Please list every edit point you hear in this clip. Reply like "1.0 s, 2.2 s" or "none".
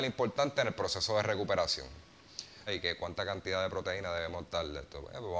2.7 s